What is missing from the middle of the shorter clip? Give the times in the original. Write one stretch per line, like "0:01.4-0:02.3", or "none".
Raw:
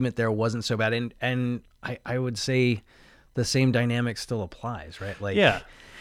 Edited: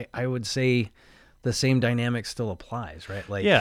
none